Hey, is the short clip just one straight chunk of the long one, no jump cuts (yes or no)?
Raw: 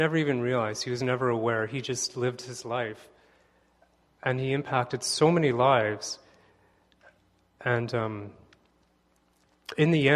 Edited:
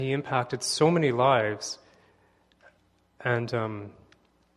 yes